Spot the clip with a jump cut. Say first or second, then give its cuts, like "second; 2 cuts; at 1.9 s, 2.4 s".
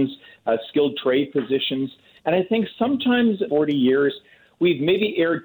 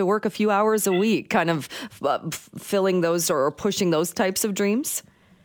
first; 2 cuts; at 2.2 s, 3.5 s